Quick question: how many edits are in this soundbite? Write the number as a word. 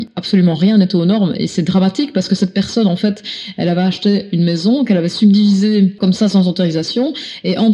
zero